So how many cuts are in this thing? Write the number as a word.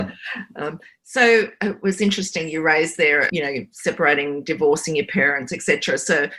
one